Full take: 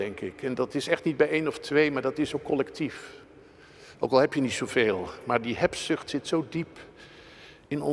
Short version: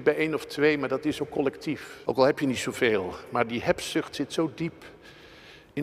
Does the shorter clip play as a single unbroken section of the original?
no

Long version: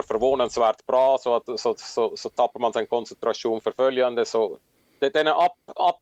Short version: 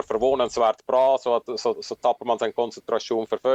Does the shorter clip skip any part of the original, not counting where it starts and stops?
yes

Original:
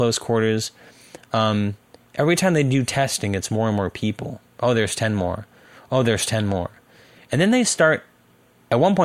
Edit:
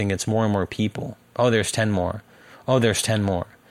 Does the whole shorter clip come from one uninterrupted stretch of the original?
yes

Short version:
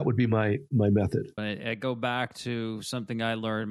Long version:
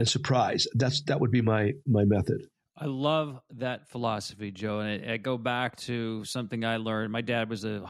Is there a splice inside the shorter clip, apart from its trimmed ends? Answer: yes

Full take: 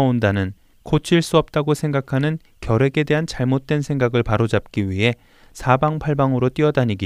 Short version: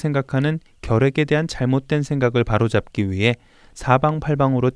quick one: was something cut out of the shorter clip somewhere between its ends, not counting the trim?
no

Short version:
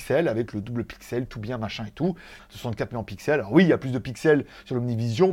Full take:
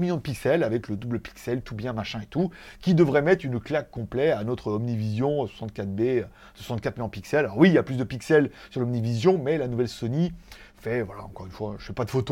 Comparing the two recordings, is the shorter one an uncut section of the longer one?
no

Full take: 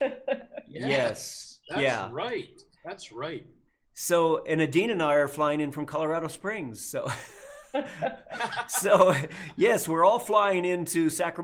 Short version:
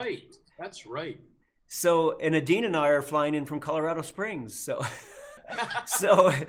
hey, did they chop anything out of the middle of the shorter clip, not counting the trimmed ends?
yes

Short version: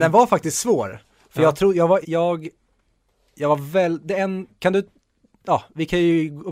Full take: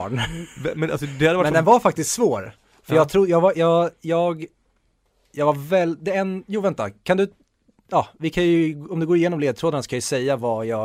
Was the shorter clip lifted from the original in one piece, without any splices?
no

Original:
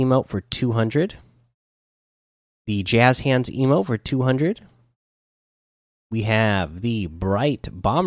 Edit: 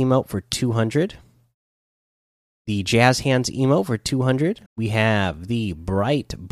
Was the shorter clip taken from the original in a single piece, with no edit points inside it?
no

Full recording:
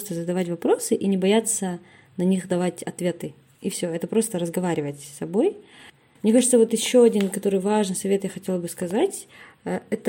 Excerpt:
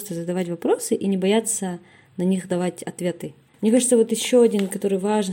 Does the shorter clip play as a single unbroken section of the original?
no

